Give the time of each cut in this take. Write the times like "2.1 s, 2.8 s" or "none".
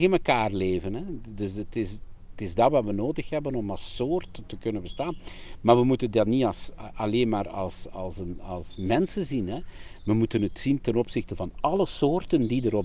none

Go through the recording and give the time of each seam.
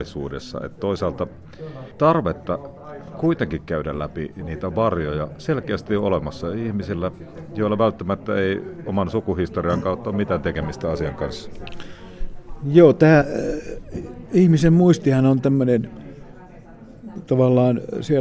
none

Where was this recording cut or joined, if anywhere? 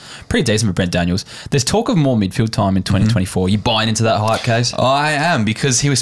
none

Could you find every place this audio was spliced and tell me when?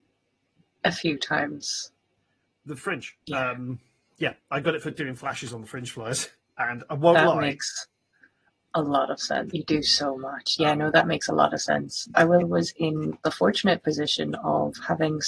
3.2 s, 9.5 s, 12.4 s

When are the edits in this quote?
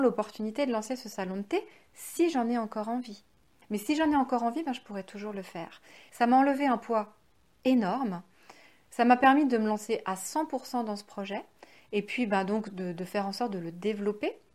3.6 s, 6.1 s

